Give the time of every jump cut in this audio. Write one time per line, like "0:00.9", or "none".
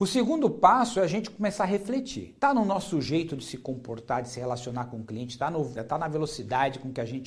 0:02.4
0:05.7